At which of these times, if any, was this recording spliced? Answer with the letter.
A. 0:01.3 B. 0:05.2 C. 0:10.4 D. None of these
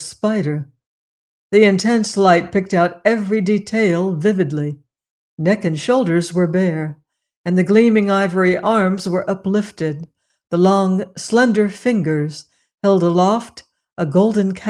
D